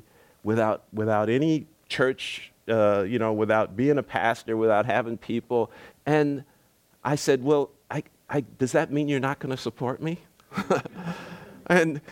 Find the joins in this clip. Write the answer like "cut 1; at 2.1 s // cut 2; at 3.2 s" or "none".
cut 1; at 5.9 s